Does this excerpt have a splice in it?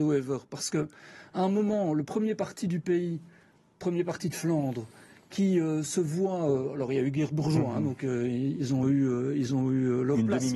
no; 0 cuts

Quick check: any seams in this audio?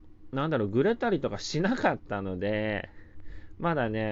no; 0 cuts

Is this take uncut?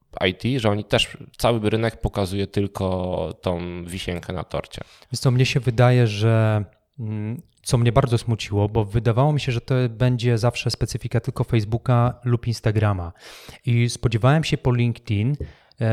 yes; 0 cuts

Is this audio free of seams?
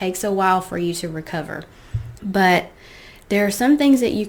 no; 1 cut; at 2.2 s

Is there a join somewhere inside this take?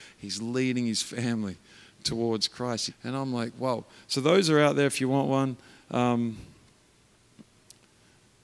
yes; 1 cut; at 2.9 s

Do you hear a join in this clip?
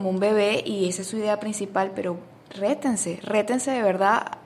no; 0 cuts

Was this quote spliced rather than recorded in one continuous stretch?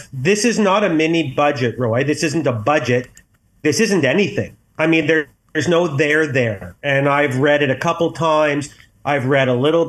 no; 0 cuts

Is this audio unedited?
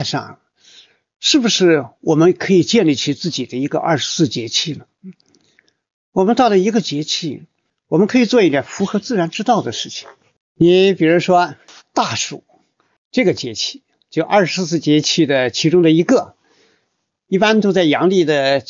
yes; 0 cuts

